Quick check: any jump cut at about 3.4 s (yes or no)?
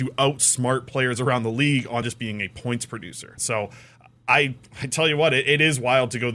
yes